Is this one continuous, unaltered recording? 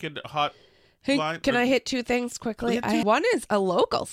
no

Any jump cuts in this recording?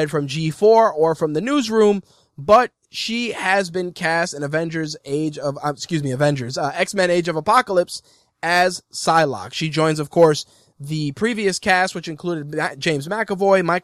no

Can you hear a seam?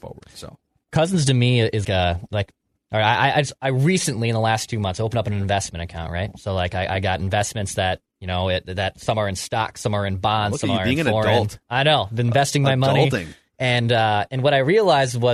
yes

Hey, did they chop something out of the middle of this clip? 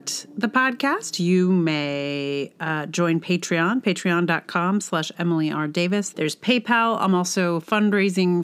yes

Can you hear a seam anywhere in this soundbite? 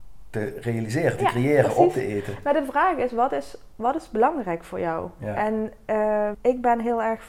yes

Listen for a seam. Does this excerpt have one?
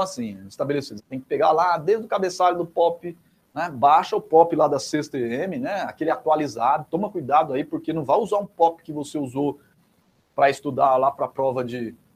yes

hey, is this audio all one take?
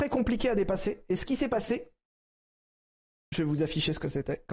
yes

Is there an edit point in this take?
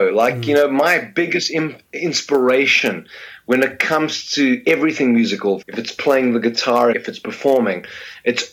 yes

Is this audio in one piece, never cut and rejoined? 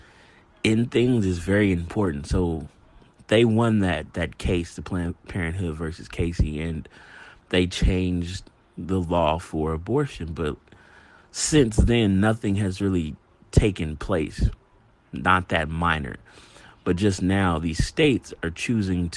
yes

